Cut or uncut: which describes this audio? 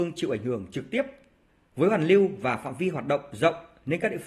uncut